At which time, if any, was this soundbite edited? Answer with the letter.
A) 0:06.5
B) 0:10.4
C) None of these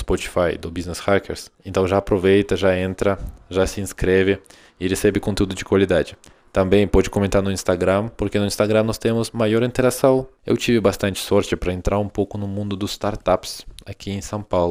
B